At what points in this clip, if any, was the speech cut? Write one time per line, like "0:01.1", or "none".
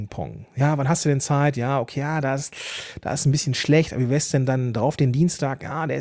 none

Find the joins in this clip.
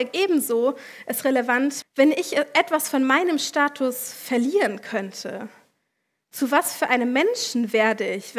0:01.8

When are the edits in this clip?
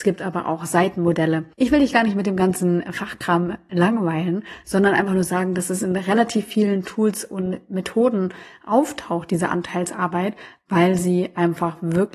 none

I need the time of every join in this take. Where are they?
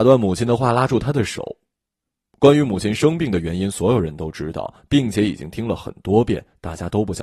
none

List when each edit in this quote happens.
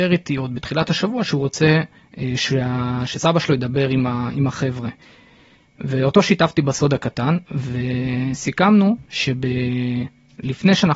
none

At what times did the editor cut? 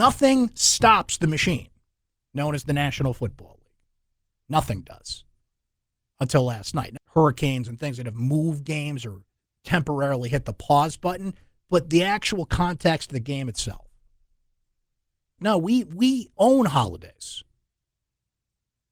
0:07.0
0:15.4

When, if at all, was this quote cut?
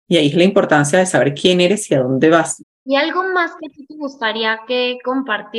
0:02.6

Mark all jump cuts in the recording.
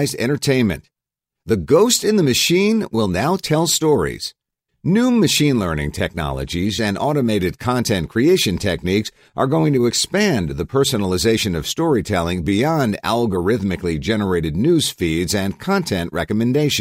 0:04.7
0:06.8

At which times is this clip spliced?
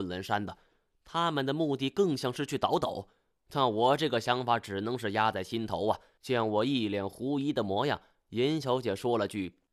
0:06.2

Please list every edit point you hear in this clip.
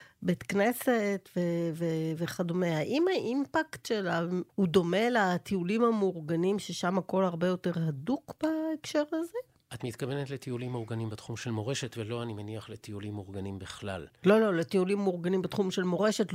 0:04.5

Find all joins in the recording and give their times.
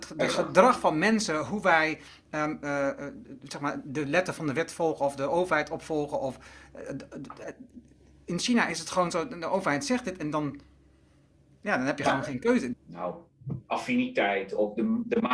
0:12.7

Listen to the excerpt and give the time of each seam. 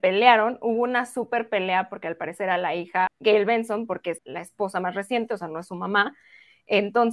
0:03.1
0:04.2

